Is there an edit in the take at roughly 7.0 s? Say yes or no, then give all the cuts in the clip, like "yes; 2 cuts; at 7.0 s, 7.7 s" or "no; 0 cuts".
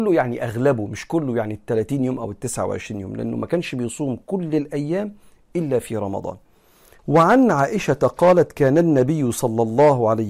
yes; 1 cut; at 7.0 s